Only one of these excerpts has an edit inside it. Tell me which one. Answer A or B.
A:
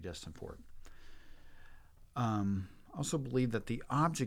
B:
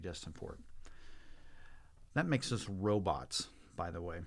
B